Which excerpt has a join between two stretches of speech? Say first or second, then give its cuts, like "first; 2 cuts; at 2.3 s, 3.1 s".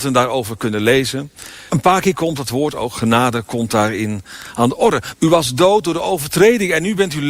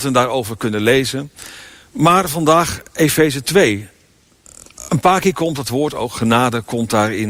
first; 2 cuts; at 1.7 s, 5.1 s